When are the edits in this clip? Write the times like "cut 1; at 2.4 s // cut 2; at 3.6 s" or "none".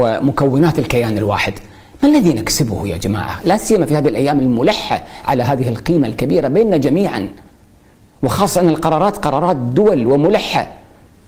none